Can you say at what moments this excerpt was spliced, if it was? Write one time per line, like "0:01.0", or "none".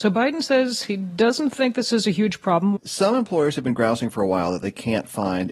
0:02.8